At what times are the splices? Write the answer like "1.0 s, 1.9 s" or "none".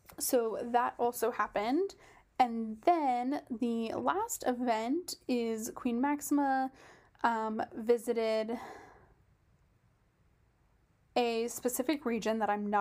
none